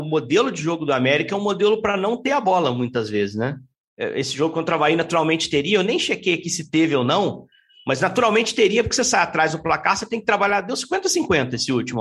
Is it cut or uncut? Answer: cut